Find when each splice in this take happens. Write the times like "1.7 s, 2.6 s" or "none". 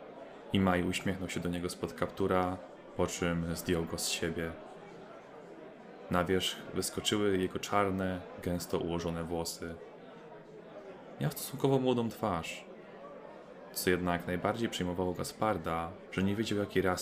16.1 s